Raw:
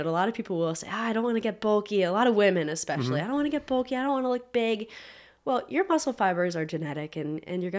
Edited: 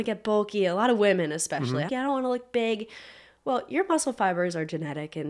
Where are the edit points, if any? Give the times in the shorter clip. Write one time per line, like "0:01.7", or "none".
0:01.9